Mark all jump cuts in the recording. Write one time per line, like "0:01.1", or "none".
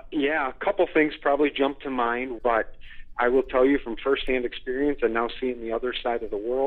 0:02.4